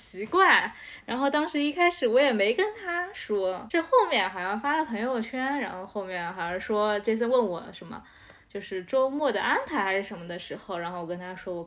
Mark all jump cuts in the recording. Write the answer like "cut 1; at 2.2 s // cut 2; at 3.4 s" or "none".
none